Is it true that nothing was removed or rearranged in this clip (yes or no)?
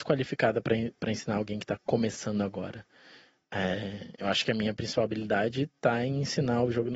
yes